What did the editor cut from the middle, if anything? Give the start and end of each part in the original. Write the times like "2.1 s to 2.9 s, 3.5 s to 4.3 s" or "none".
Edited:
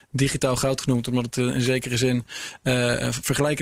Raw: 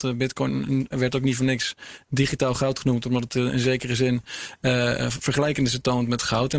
none